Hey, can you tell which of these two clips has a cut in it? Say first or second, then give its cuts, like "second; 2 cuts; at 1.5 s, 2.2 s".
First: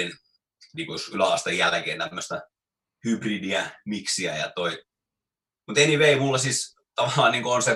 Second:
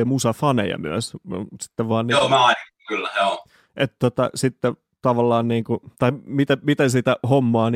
second; 1 cut; at 5.9 s